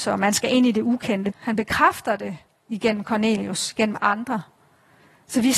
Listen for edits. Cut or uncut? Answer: cut